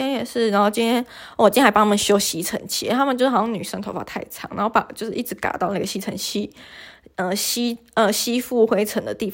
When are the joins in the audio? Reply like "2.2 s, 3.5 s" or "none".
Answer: none